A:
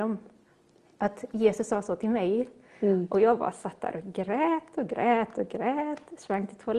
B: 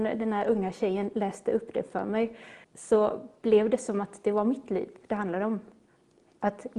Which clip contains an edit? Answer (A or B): B